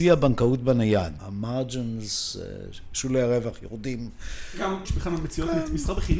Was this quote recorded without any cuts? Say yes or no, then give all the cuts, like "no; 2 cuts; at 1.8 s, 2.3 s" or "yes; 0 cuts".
no; 2 cuts; at 1.2 s, 4.9 s